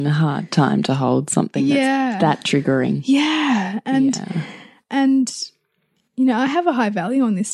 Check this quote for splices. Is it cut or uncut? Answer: uncut